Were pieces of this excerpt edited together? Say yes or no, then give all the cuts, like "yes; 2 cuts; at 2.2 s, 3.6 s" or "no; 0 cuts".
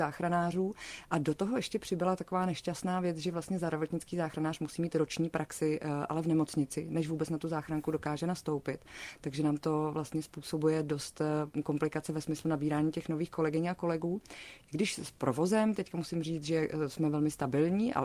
no; 0 cuts